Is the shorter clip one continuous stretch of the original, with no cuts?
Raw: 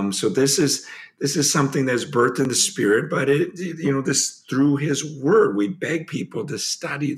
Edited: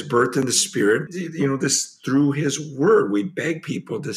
no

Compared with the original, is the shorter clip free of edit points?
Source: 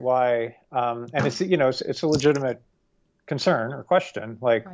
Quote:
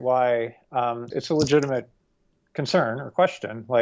no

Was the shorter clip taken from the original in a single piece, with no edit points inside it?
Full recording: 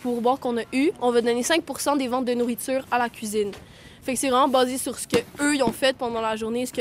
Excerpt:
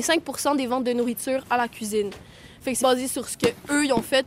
no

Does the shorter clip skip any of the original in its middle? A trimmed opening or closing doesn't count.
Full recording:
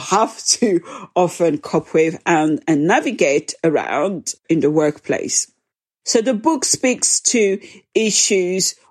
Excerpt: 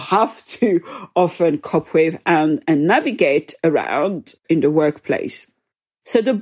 no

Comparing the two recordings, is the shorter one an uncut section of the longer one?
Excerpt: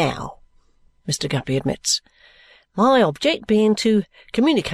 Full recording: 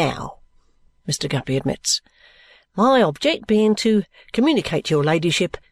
yes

